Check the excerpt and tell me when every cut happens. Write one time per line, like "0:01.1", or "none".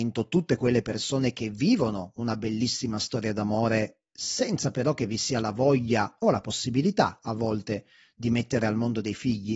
none

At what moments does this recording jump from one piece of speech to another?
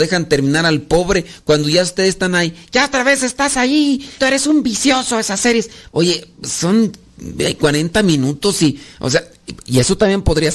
0:04.2
0:05.9

